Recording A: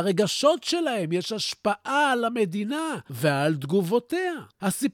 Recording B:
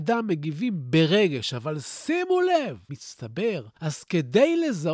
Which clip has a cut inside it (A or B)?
B